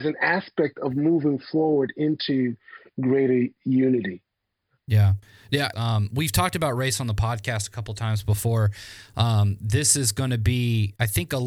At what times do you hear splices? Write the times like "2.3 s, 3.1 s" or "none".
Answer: 5.7 s

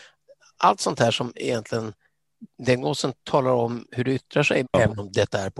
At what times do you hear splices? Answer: 4.6 s

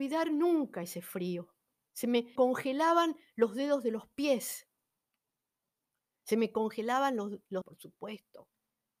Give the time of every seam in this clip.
2.4 s, 7.6 s

